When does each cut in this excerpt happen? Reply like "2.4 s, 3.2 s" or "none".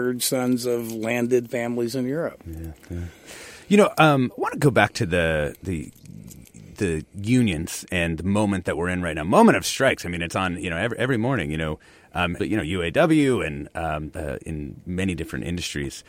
12.4 s, 14.1 s